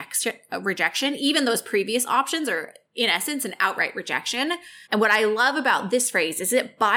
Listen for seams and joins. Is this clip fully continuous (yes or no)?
no